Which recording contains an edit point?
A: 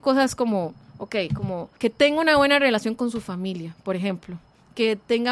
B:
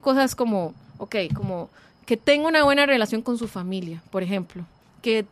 A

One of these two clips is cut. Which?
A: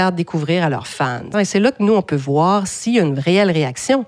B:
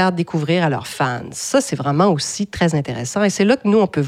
A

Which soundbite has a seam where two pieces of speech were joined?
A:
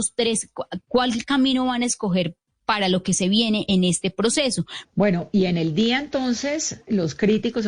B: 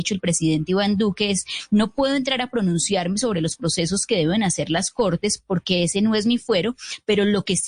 A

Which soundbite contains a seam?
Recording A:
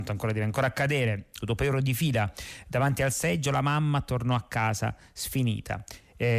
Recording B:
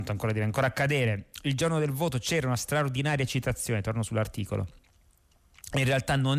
A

